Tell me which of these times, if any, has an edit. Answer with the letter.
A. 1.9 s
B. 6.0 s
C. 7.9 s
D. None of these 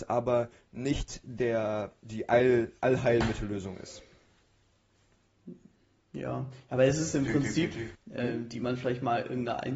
C